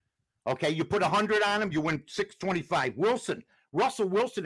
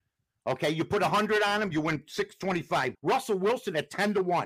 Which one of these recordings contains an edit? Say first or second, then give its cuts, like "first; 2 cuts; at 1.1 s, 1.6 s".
second; 1 cut; at 2.9 s